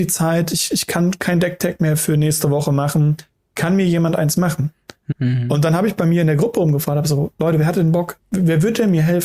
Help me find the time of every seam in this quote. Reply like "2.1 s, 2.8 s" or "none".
5.1 s